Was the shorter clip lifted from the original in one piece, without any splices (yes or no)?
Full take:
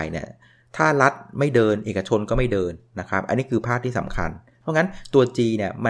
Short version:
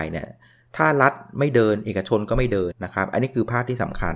no